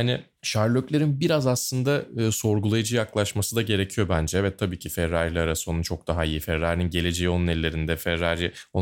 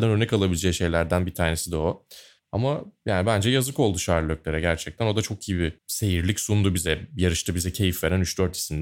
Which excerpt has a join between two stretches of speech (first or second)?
second